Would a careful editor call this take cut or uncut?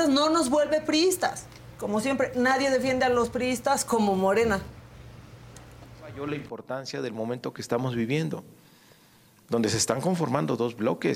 uncut